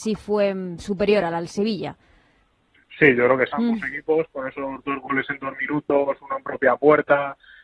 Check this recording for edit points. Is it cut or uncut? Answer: cut